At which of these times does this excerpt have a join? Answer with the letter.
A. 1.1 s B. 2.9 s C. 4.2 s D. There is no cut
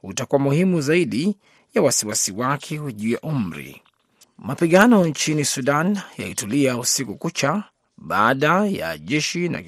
C